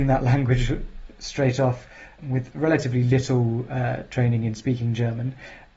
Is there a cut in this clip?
yes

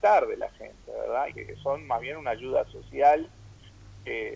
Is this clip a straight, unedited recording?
no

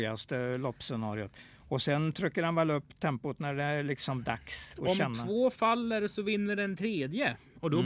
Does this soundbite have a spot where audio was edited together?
no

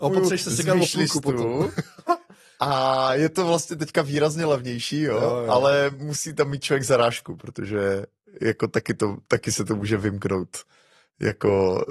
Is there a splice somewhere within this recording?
no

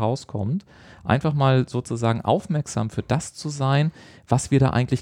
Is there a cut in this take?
no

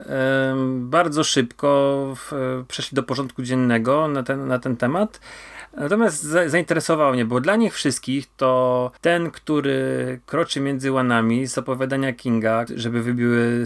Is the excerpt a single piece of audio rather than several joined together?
no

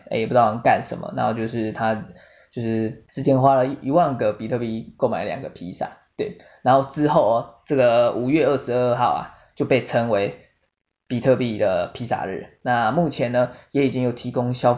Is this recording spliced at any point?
yes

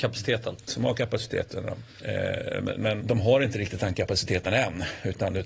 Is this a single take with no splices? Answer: no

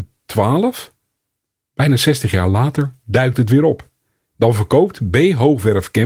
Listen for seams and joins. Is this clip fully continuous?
yes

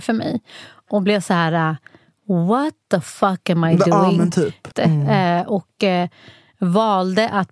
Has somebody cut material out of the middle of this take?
yes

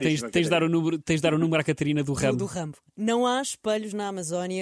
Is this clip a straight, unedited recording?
yes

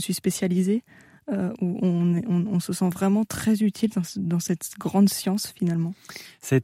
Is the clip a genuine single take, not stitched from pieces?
yes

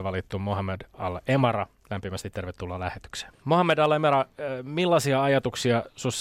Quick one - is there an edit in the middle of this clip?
yes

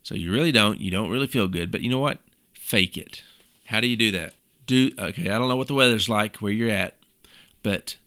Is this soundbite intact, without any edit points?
yes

